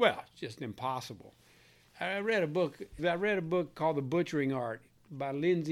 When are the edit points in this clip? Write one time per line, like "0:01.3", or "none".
0:01.9
0:03.0

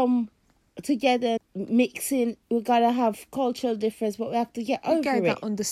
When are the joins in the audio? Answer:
0:01.4

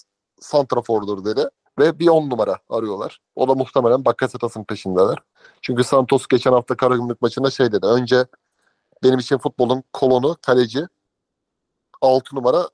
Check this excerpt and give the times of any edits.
0:01.7

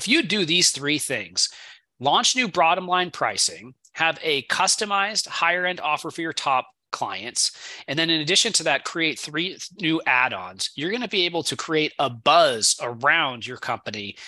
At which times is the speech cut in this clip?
none

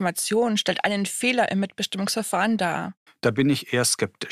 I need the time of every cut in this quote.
0:03.1

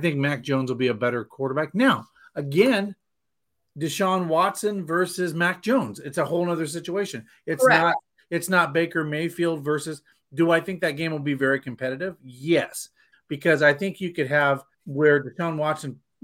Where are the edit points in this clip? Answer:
0:13.1
0:14.7

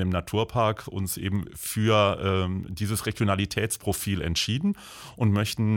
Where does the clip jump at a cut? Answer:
none

